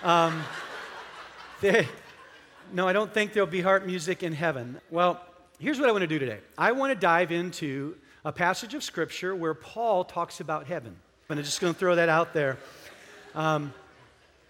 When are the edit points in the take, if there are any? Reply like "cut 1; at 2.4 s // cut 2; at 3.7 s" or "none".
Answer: cut 1; at 4.8 s // cut 2; at 11.3 s